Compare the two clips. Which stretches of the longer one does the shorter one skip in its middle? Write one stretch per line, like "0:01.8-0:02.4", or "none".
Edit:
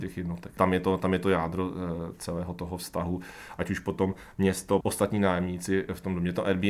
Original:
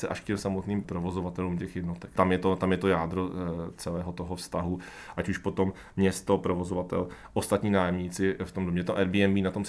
0:06.4-0:07.3